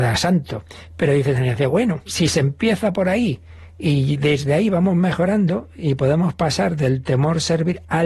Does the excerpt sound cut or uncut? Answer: cut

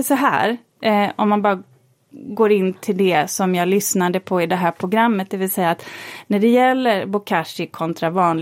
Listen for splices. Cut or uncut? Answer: uncut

